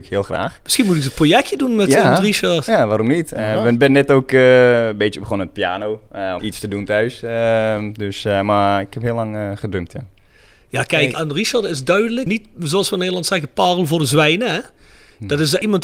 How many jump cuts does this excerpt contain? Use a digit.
1